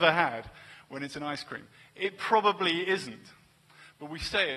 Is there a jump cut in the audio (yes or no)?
no